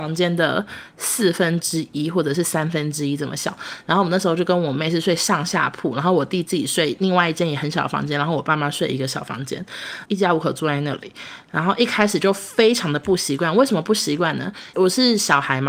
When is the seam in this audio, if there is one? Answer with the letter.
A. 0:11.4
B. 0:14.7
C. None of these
B